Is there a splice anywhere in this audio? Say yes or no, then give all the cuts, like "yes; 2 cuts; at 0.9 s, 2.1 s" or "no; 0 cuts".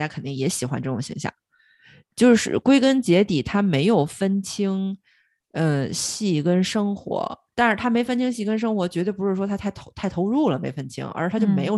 no; 0 cuts